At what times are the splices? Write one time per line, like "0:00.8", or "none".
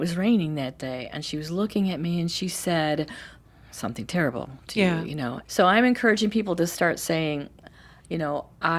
0:05.5

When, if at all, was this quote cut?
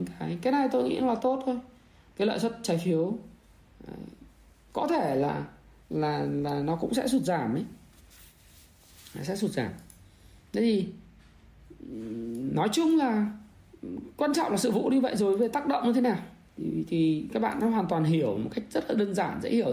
none

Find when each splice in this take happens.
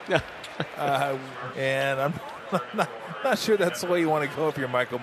0:01.5

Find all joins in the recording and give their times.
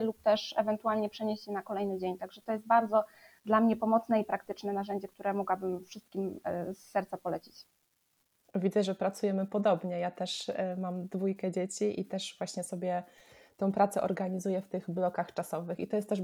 none

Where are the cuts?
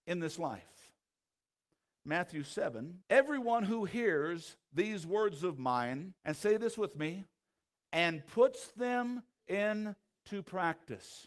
0:03.0
0:06.2

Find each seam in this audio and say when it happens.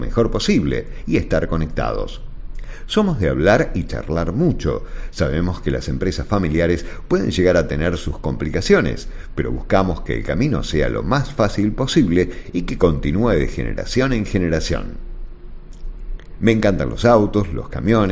0:16.4

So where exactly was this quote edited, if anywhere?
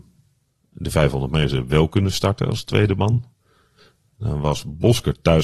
none

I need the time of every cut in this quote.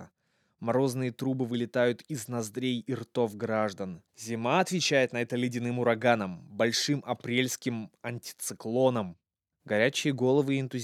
0:04.1
0:09.5

